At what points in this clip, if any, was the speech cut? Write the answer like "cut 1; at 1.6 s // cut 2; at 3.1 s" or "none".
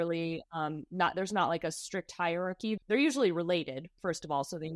cut 1; at 2.8 s